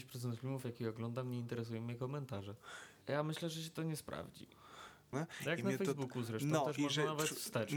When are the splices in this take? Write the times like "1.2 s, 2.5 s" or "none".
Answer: 3.0 s, 5.1 s

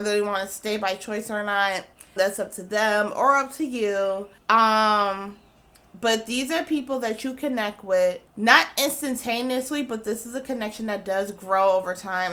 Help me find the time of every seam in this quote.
2.2 s, 4.4 s, 8.3 s

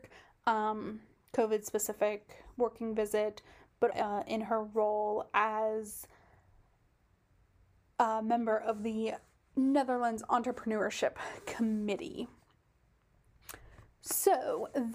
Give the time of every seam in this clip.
3.9 s

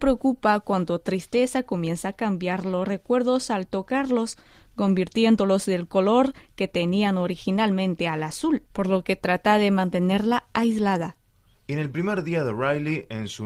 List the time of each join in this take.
8.7 s

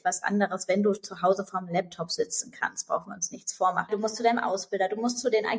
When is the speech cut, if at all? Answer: 3.9 s

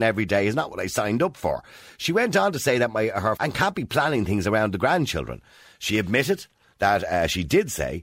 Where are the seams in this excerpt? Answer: 3.4 s

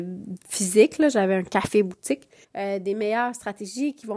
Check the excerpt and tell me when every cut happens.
2.4 s

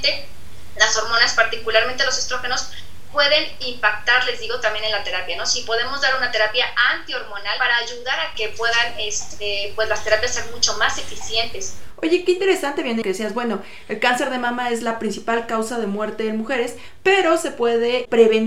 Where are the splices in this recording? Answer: 13.0 s

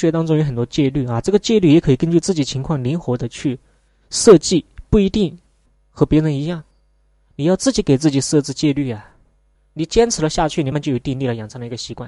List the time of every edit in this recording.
9.5 s, 10.7 s

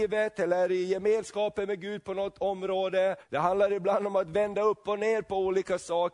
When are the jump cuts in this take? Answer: 3.2 s

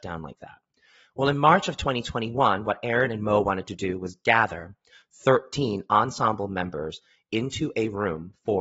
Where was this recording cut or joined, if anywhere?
none

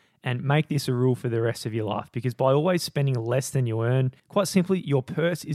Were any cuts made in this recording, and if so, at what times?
4.2 s

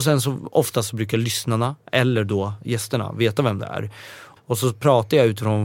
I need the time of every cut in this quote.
4.4 s

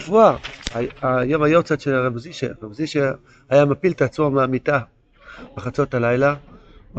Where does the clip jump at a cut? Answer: none

